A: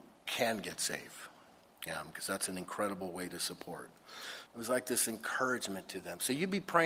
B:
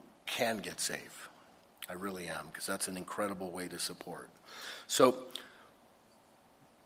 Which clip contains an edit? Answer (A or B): A